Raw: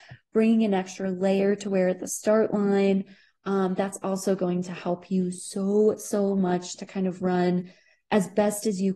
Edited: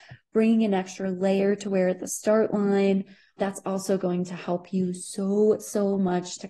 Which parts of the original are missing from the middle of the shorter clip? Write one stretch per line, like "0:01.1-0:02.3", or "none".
0:03.4-0:03.8